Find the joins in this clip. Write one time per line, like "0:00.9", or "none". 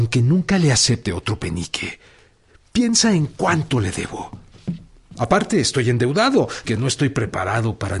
0:06.6